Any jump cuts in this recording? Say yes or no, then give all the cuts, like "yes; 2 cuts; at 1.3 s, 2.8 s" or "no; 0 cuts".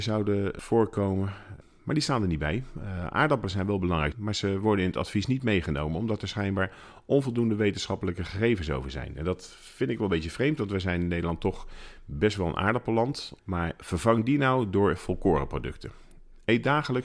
yes; 2 cuts; at 4.1 s, 13.4 s